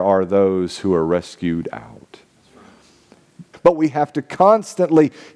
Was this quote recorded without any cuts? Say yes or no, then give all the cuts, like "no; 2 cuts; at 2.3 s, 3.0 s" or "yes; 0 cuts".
no; 1 cut; at 3.5 s